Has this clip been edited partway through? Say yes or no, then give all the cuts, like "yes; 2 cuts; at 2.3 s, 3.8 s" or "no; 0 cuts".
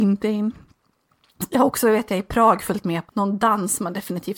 yes; 1 cut; at 3.1 s